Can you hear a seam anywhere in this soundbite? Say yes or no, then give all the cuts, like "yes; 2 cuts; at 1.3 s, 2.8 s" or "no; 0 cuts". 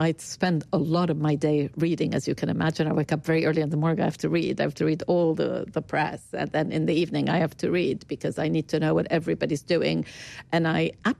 no; 0 cuts